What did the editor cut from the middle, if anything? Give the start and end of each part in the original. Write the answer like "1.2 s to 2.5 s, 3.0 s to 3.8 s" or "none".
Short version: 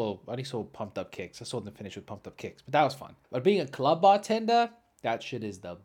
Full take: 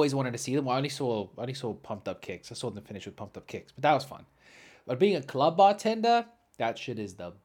4.3 s to 4.8 s